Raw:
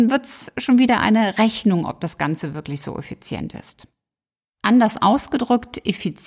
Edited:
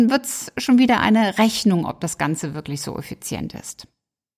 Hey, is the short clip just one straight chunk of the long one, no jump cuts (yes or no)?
yes